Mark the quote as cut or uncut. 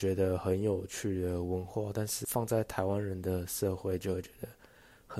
uncut